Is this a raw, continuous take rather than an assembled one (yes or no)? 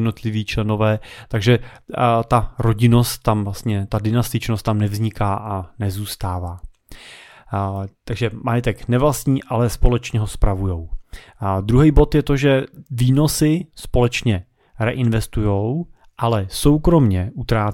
yes